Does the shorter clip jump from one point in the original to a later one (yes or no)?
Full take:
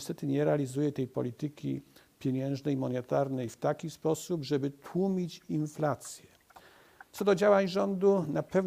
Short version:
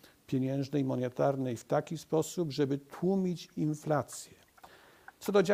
no